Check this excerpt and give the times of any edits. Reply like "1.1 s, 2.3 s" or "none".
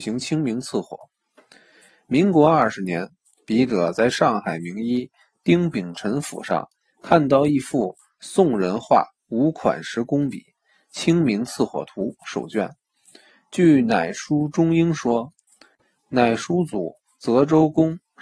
none